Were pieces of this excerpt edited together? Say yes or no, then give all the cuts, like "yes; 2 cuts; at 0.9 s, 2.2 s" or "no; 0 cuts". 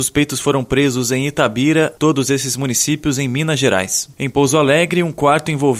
yes; 1 cut; at 1.9 s